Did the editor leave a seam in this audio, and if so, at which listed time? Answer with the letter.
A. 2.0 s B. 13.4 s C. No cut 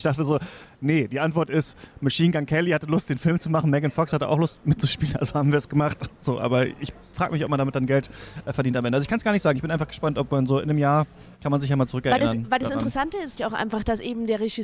B